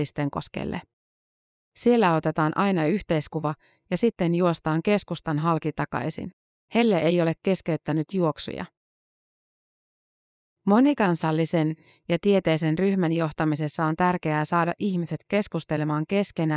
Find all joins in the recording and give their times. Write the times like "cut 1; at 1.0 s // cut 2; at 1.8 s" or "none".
cut 1; at 6.6 s